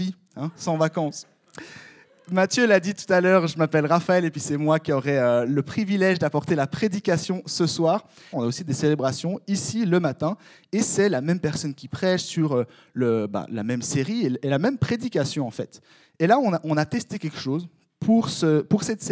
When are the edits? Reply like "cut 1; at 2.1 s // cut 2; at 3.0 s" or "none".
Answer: cut 1; at 8.3 s